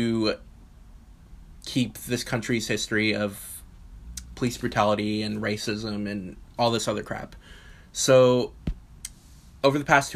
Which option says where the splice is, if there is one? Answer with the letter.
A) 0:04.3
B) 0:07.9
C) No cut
A